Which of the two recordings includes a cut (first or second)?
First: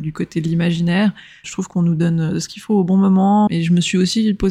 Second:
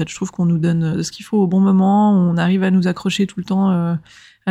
first